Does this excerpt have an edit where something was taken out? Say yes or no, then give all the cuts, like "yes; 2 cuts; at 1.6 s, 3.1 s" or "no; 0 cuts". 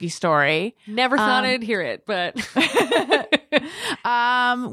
no; 0 cuts